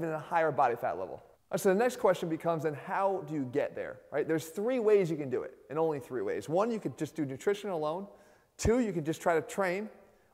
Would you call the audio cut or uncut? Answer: uncut